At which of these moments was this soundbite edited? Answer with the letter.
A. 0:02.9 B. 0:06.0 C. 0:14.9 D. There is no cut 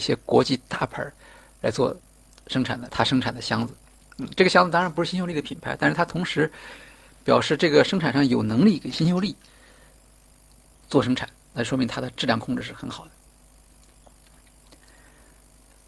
A